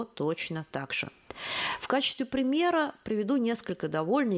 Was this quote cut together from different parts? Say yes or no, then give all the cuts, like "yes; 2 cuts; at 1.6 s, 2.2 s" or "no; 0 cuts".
no; 0 cuts